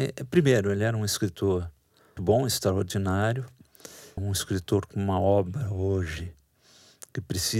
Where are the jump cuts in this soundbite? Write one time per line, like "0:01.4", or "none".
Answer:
0:02.2
0:04.2